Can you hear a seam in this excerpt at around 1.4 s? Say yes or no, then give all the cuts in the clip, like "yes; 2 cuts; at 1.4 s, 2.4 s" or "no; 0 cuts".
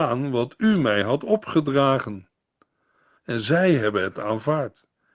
no; 1 cut; at 3.2 s